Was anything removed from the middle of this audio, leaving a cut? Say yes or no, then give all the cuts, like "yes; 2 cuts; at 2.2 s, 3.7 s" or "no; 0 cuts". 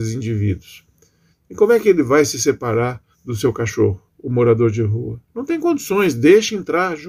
yes; 2 cuts; at 1.3 s, 3.1 s